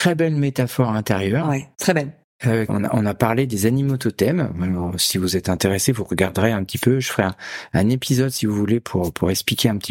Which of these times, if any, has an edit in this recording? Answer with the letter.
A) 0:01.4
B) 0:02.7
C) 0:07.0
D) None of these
B